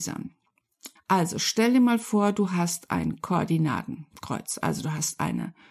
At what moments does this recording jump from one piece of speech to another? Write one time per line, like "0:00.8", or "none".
0:01.0